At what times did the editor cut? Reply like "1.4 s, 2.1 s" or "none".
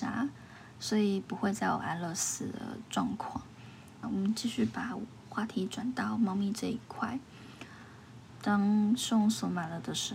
4.0 s, 8.3 s